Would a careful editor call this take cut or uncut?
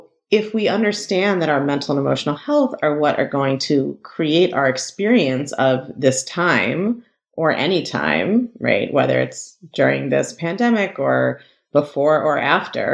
uncut